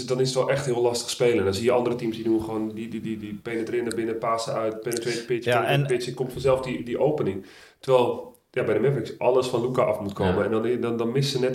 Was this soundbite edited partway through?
no; 0 cuts

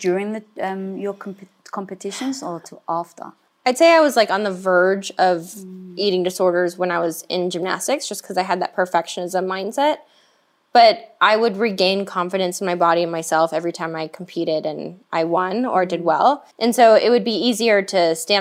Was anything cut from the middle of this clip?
yes; 2 cuts; at 3.5 s, 16.5 s

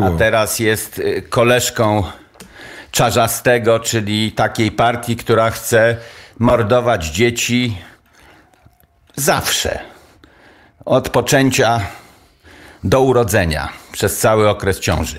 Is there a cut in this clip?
no; 0 cuts

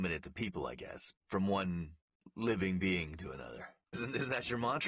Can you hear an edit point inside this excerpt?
yes; 1 cut; at 3.9 s

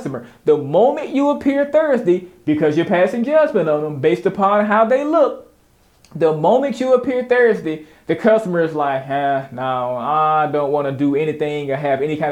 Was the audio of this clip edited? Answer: no; 0 cuts

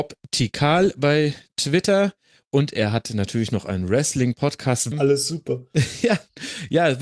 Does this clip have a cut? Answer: yes; 1 cut; at 4.9 s

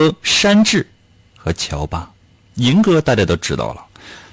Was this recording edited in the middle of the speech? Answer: no; 0 cuts

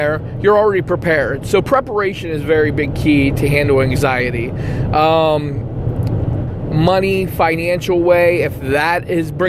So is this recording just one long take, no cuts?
no; 1 cut; at 6.4 s

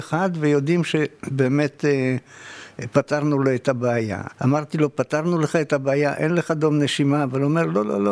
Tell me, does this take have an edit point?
yes; 1 cut; at 4.3 s

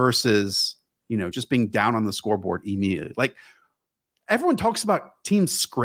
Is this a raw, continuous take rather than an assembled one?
yes; 0 cuts

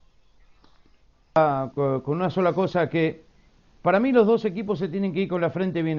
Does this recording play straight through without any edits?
no; 1 cut; at 1.7 s

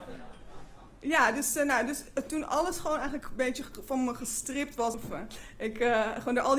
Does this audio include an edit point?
yes; 1 cut; at 4.9 s

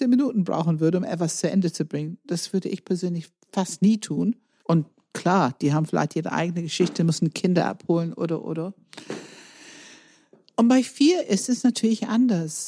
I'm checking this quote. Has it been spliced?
yes; 1 cut; at 4.6 s

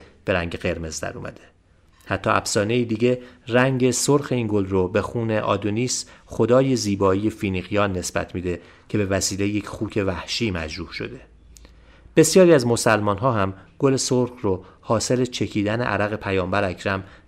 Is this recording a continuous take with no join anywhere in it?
yes; 0 cuts

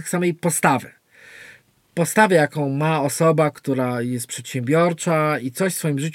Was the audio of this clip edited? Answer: no; 0 cuts

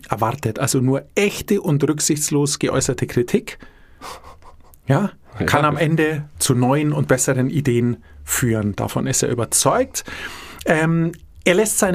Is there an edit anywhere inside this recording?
no; 0 cuts

